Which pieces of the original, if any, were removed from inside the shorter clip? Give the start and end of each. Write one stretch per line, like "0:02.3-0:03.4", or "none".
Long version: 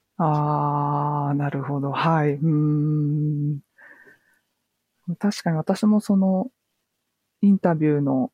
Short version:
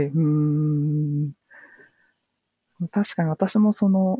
none